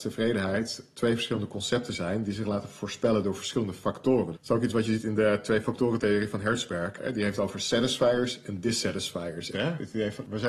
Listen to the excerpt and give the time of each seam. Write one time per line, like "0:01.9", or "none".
0:04.3
0:09.5

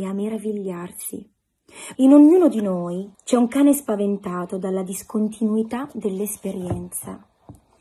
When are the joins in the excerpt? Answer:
0:01.9
0:03.1

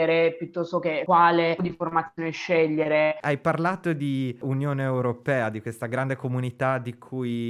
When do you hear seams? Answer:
0:01.6
0:03.2

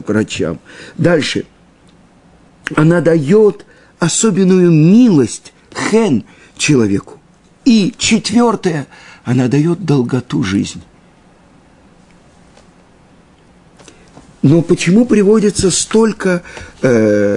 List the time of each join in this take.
none

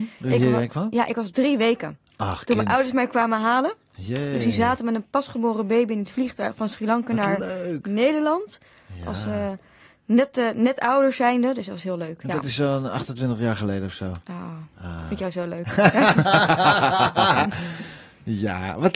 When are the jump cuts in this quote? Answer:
none

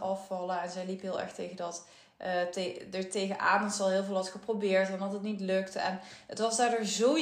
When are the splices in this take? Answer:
none

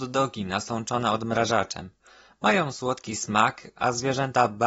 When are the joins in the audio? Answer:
none

